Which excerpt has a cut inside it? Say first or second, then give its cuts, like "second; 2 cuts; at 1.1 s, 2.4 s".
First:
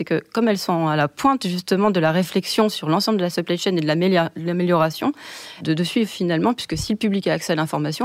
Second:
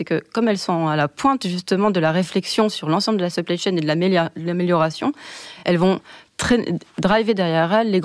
first; 1 cut; at 5.6 s